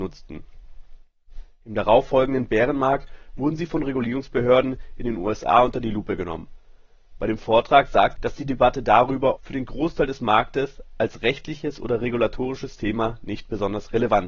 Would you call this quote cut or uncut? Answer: cut